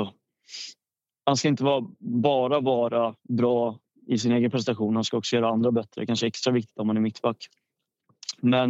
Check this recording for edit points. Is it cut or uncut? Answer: uncut